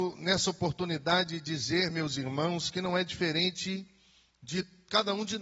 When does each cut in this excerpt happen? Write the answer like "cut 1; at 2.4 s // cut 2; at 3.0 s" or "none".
none